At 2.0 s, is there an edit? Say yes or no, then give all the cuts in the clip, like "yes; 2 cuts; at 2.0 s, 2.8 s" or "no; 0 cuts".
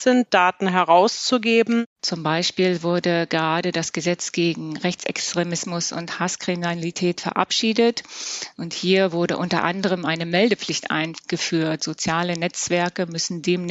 yes; 1 cut; at 2.0 s